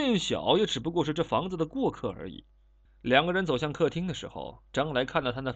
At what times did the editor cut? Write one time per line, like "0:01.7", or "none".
0:02.9